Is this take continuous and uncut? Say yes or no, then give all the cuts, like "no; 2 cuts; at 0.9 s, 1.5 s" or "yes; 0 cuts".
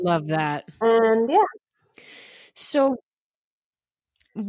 yes; 0 cuts